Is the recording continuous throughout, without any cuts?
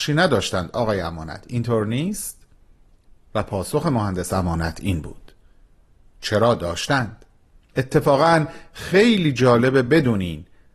yes; 0 cuts

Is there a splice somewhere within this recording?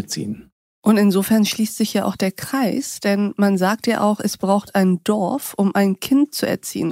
no; 0 cuts

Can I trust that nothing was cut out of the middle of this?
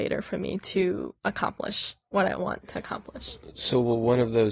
yes; 0 cuts

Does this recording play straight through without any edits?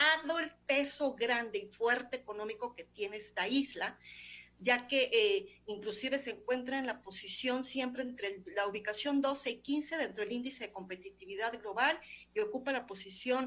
yes; 0 cuts

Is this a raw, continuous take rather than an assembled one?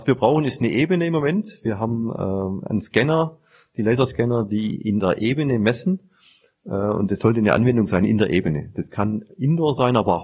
yes; 0 cuts

